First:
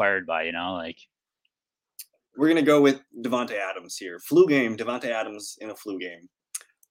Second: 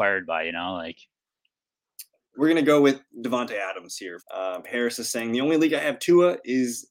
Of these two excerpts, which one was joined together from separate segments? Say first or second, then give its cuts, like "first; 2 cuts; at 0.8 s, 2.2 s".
second; 1 cut; at 4.2 s